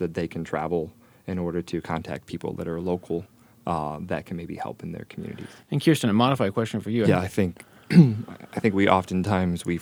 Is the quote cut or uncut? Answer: cut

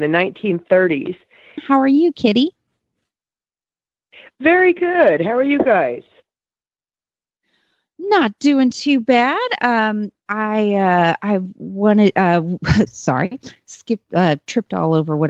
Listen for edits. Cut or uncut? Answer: cut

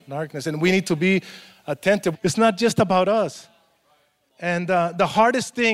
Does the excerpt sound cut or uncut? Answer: cut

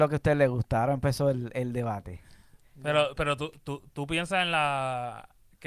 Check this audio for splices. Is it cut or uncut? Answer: uncut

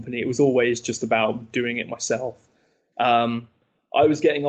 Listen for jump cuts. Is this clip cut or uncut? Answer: cut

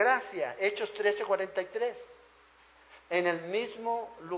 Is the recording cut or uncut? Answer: cut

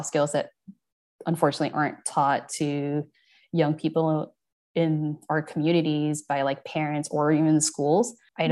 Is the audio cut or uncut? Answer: uncut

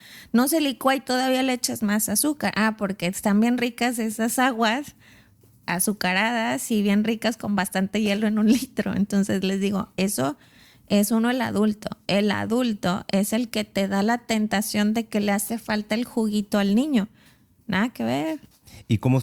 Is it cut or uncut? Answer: uncut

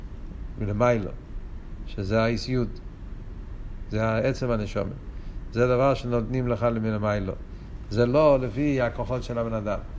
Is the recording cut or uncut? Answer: uncut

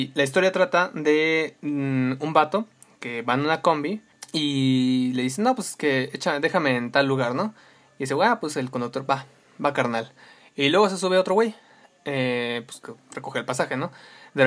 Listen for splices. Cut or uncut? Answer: uncut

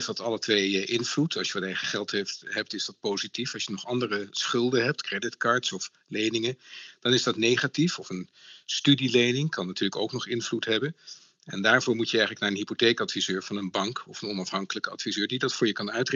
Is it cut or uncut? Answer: uncut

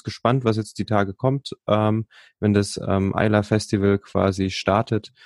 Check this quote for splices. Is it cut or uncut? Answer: uncut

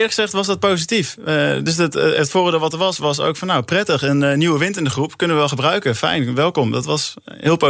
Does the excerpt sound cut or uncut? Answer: uncut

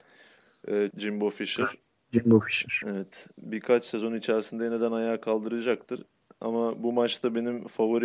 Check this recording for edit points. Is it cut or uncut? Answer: cut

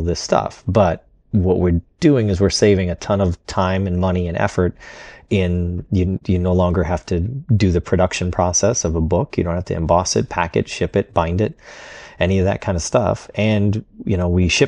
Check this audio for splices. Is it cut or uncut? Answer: uncut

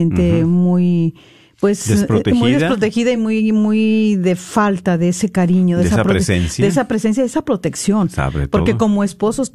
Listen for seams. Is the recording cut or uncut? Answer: uncut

